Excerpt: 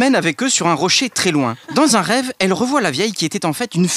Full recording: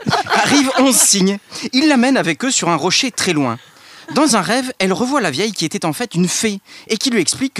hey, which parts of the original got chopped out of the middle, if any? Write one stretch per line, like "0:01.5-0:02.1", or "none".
0:03.6-0:04.0